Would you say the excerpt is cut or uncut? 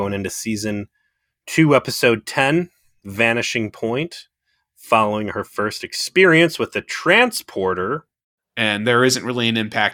cut